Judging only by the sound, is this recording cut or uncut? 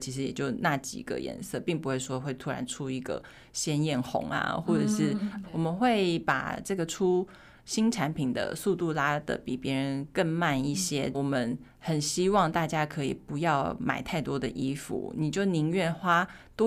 cut